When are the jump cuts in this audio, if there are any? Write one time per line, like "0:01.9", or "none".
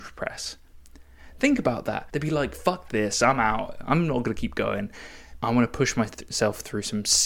0:02.1
0:05.4